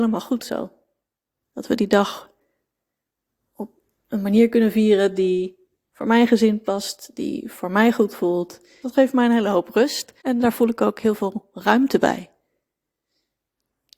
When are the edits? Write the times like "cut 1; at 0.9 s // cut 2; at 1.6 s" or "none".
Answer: cut 1; at 8.8 s // cut 2; at 10.2 s